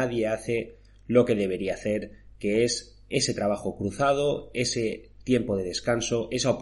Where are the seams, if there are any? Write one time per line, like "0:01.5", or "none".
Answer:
none